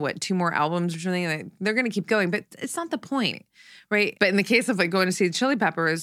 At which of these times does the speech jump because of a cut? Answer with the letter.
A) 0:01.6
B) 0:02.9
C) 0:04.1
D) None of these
C